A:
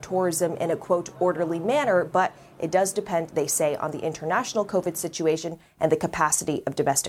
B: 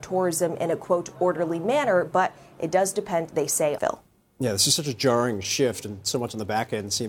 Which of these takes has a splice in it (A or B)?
B